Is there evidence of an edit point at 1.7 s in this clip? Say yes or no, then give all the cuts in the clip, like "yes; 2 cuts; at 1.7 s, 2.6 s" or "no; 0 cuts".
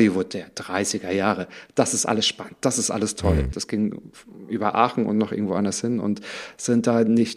no; 1 cut; at 3.5 s